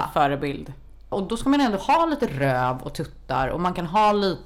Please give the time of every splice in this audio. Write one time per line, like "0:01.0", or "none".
0:01.1